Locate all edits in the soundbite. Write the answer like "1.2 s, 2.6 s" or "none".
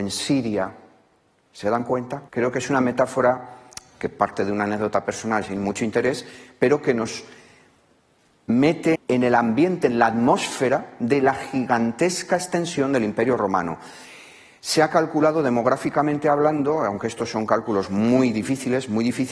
2.3 s, 8.9 s